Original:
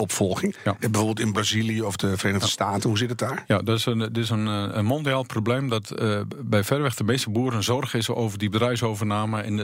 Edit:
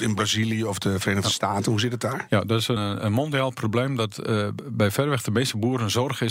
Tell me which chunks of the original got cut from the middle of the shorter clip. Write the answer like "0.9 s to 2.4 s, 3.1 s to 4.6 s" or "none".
3.9 s to 4.5 s